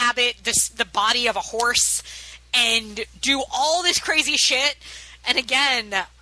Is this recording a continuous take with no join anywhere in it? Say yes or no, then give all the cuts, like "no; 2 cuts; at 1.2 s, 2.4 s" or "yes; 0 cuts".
no; 1 cut; at 5.2 s